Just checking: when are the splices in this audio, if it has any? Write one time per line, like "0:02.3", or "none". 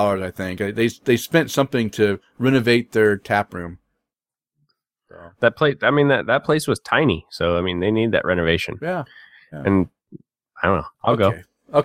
0:10.9